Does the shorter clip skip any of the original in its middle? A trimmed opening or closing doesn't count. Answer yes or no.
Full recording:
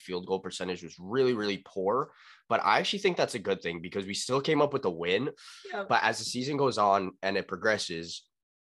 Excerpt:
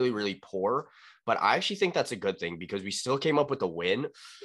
no